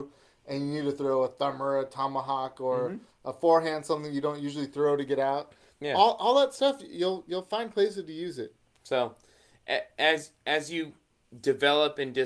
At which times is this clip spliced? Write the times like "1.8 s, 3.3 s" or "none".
none